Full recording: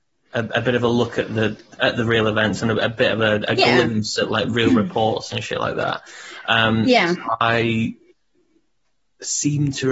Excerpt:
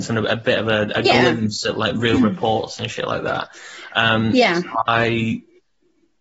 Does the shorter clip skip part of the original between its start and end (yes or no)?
no